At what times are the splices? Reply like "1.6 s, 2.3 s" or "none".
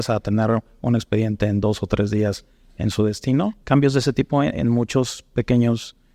3.6 s